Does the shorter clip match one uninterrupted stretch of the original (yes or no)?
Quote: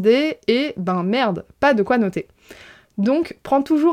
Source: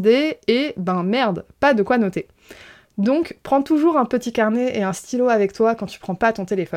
yes